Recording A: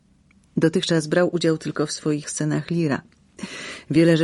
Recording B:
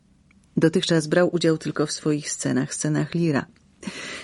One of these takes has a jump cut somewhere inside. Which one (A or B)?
A